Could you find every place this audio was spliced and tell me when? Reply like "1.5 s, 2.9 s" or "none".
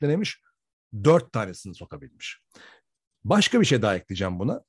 none